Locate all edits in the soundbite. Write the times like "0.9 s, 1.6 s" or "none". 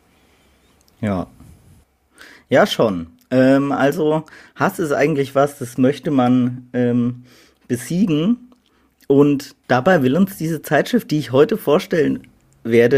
none